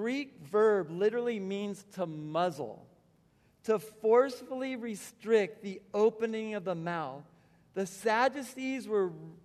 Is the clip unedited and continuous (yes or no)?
yes